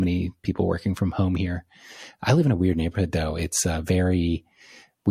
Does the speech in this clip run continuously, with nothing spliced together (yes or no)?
yes